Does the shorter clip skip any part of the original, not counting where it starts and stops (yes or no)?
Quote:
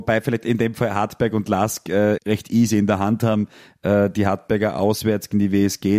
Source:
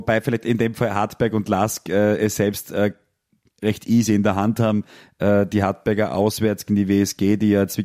yes